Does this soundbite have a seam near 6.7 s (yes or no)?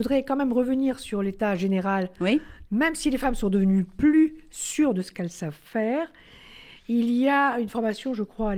no